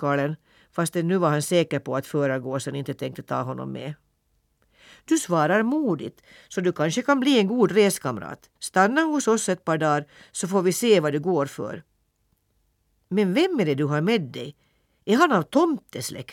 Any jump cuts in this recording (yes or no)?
yes